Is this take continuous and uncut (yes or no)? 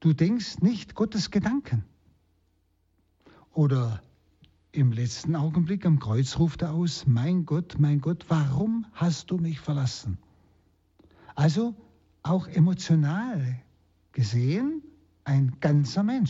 yes